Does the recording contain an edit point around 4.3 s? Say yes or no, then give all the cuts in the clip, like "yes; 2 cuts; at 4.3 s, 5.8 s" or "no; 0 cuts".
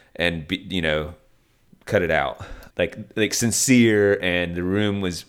no; 1 cut; at 2.7 s